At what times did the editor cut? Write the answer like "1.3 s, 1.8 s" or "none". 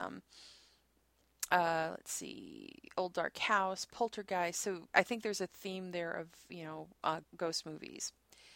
4.9 s, 7.2 s